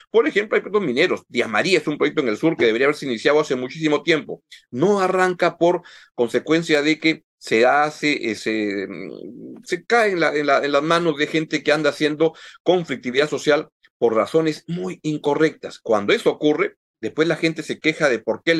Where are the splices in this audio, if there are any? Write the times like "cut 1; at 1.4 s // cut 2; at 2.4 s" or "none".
cut 1; at 8.4 s